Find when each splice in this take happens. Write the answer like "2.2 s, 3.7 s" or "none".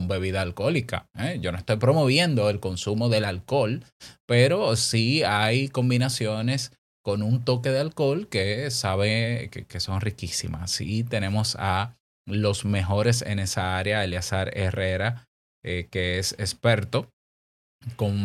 none